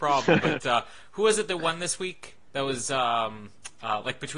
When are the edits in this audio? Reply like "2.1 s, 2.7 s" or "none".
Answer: 2.5 s